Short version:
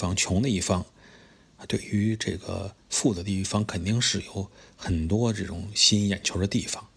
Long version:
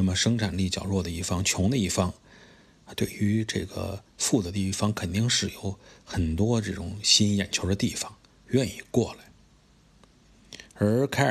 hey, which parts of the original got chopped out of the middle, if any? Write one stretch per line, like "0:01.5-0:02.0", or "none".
none